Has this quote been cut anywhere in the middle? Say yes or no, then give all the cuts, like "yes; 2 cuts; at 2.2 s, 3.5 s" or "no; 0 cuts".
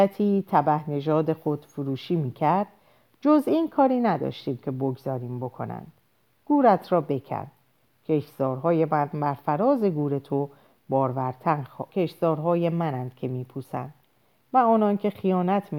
yes; 1 cut; at 11.9 s